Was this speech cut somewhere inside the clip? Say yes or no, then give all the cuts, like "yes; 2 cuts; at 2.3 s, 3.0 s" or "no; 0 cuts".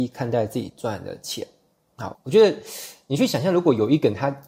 yes; 1 cut; at 2.1 s